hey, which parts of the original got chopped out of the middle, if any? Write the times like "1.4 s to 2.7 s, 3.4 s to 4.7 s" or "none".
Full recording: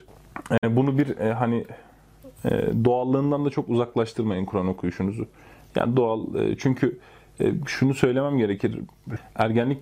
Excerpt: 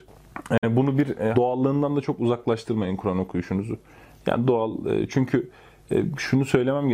1.3 s to 2.8 s